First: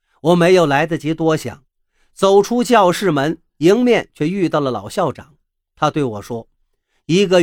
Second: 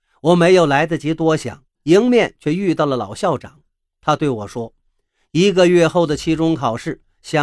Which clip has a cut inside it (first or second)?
second